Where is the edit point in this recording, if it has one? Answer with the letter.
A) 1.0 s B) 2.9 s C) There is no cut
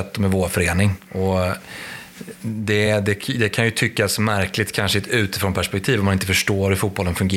C